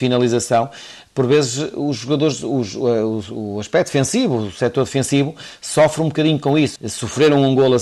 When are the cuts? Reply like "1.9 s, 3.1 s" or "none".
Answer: 6.8 s